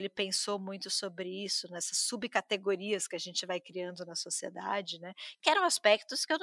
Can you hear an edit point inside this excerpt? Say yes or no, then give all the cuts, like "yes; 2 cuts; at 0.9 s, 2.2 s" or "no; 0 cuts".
no; 0 cuts